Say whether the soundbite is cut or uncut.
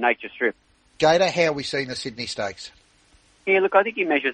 cut